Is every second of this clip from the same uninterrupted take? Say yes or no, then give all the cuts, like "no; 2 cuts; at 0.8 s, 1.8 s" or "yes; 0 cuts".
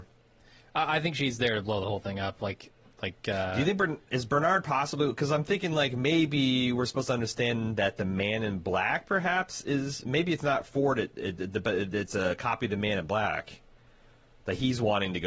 yes; 0 cuts